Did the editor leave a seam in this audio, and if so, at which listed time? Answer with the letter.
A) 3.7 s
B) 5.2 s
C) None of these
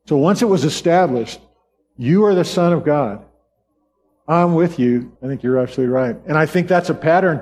B